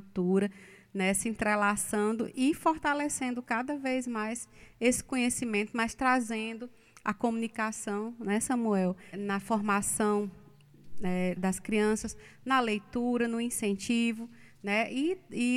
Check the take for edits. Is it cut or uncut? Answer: cut